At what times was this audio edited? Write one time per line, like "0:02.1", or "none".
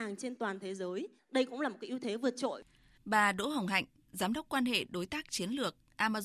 0:01.2
0:03.0